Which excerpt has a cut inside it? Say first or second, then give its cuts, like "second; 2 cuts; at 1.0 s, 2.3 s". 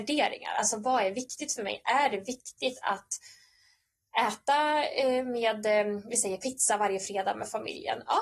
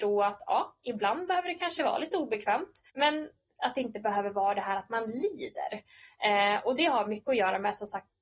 second; 1 cut; at 2.9 s